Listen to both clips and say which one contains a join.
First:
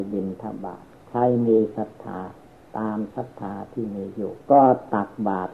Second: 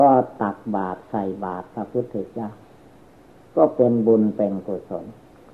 first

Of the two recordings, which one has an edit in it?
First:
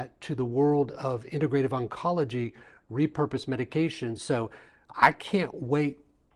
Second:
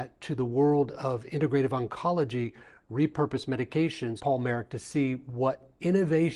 second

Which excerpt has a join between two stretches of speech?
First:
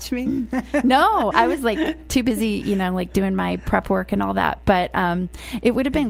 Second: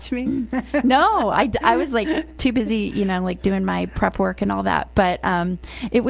first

